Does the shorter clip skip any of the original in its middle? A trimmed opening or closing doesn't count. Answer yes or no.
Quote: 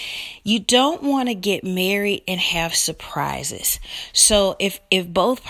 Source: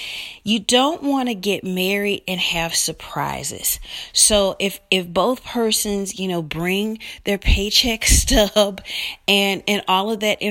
no